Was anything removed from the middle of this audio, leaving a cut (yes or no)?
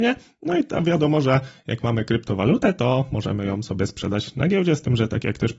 no